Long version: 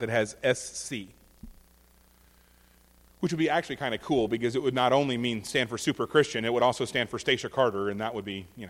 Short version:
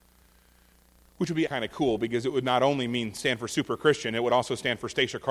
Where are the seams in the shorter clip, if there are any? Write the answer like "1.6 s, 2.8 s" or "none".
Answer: 1.5 s